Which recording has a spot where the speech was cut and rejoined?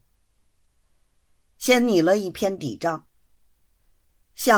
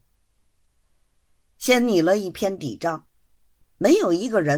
second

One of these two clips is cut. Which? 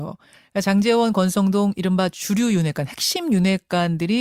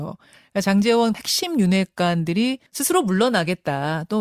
second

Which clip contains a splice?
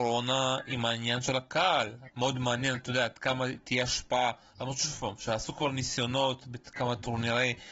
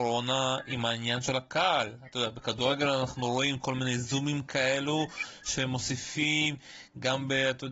first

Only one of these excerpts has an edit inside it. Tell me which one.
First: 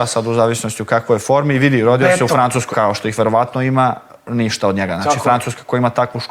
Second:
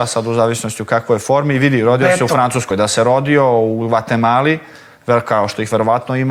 first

